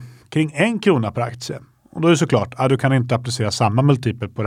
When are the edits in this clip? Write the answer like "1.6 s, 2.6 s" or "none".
none

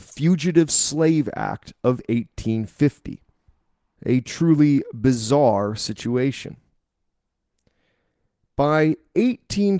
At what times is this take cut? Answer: 4.0 s

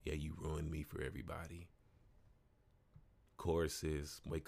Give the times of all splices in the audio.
none

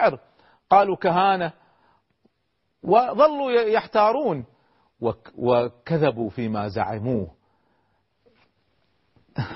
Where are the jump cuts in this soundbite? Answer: none

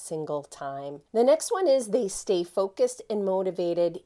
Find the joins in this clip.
1.1 s

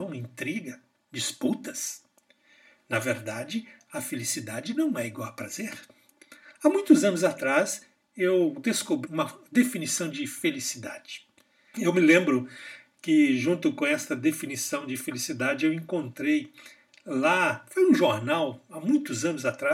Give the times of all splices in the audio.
9.1 s, 11.7 s

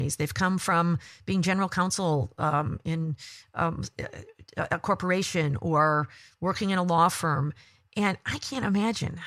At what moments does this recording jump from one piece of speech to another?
4.5 s

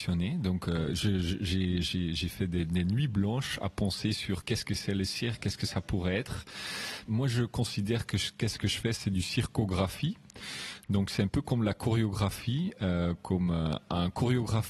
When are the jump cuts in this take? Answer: 7.1 s

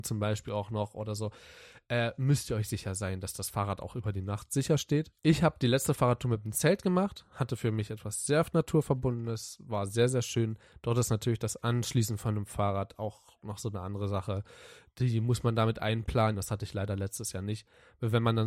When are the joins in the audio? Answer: 5.2 s, 16.3 s

